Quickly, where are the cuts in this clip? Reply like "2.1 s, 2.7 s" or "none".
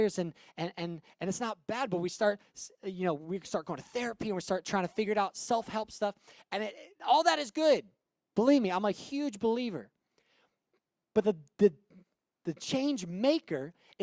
none